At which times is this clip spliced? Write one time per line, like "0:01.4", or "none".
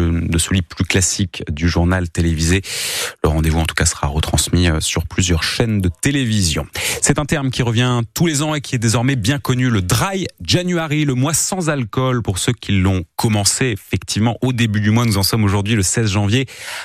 none